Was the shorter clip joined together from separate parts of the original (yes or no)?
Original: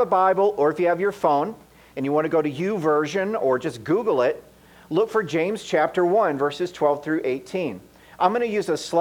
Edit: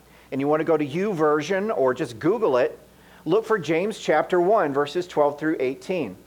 no